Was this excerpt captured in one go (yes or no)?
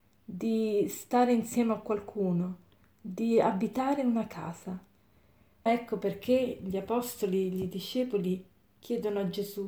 no